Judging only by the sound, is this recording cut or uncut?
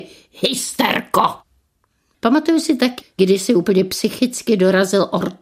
cut